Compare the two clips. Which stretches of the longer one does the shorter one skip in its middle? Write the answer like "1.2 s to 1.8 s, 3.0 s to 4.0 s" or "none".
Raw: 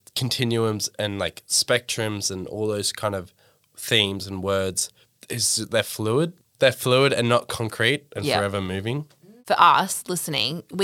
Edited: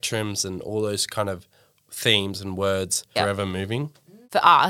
5.0 s to 8.3 s